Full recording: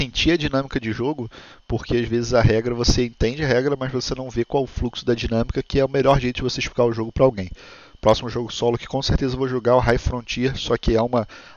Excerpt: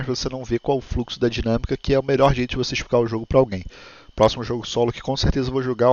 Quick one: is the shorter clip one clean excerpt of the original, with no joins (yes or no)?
yes